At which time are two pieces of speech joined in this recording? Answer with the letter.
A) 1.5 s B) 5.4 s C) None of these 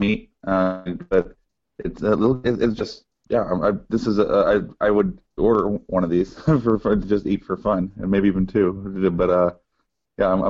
B